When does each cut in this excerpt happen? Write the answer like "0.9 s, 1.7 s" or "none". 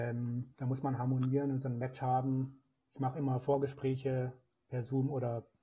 none